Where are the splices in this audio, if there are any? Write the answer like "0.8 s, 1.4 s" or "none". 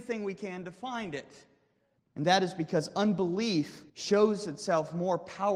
2.0 s, 3.9 s